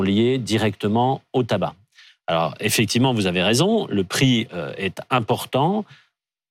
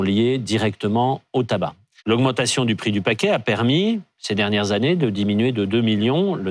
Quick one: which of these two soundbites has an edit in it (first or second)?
second